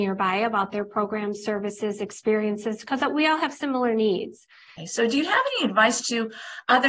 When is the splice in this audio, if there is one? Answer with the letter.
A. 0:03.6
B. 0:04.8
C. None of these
B